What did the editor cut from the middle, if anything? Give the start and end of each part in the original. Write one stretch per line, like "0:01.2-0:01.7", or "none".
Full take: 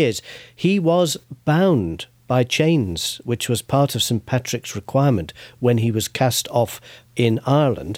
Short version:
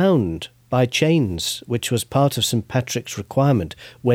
none